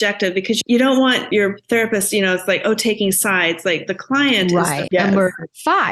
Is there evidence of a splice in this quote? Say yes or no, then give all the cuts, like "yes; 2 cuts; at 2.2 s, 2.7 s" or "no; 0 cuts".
yes; 1 cut; at 4.9 s